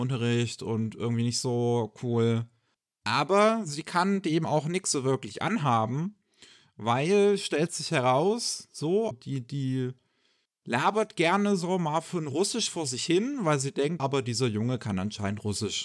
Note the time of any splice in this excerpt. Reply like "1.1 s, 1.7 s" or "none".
9.1 s, 14.0 s